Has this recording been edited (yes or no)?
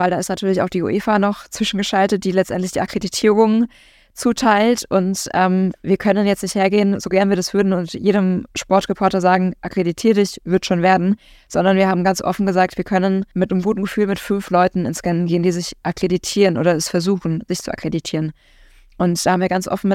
no